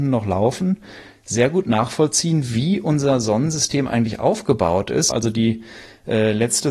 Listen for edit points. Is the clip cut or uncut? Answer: cut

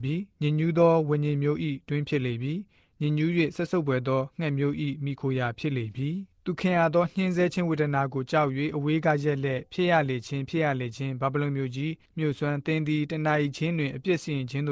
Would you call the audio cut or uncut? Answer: cut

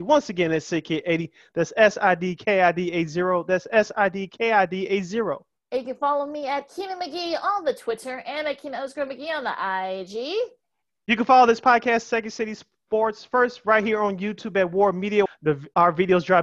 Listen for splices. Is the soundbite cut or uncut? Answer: cut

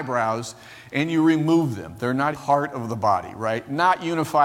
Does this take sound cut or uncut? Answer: cut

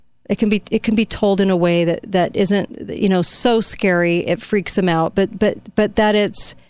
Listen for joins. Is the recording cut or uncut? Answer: cut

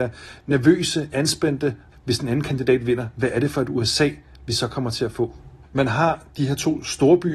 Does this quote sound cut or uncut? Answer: cut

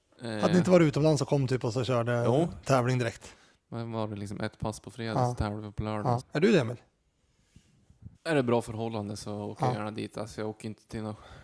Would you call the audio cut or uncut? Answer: cut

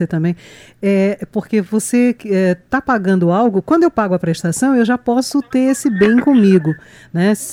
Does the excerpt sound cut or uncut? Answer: uncut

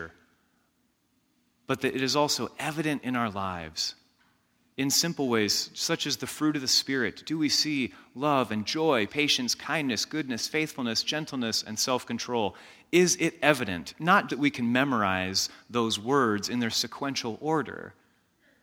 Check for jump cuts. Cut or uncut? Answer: cut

